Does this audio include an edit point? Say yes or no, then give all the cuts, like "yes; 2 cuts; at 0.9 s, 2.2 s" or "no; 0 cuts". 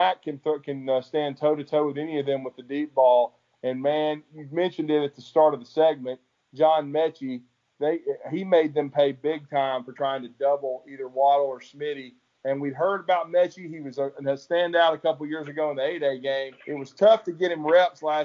yes; 1 cut; at 16.6 s